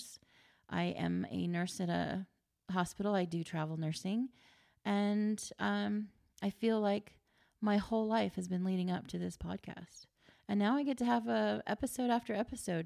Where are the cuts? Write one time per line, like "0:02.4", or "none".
0:10.3